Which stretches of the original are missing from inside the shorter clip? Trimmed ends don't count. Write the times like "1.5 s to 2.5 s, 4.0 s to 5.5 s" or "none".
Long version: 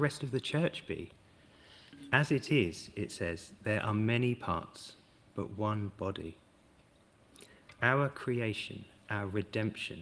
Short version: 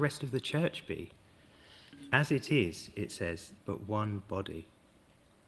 3.6 s to 5.3 s